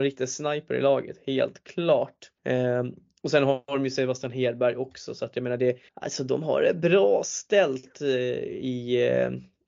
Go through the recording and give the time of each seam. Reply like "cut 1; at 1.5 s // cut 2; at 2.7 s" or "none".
cut 1; at 2.4 s // cut 2; at 5.9 s